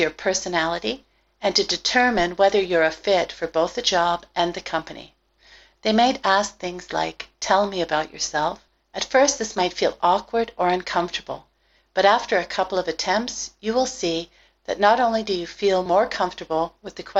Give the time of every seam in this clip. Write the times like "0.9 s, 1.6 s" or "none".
8.8 s